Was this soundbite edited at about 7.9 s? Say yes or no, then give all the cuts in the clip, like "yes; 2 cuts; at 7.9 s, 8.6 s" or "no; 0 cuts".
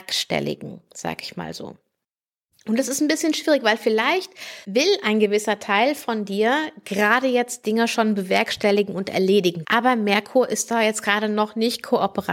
no; 2 cuts; at 4.6 s, 9.6 s